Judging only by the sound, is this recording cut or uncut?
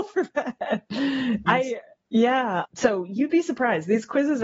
cut